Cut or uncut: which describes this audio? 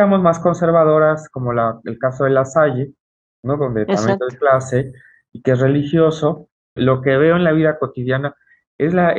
cut